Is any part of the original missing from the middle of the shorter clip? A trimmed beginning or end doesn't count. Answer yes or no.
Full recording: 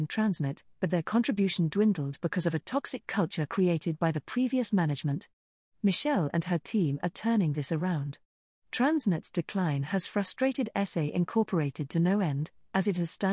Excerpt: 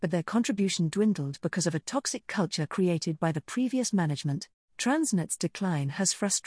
yes